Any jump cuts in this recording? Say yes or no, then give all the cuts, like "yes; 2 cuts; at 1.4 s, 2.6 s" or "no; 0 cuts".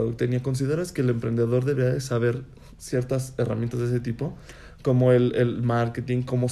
no; 0 cuts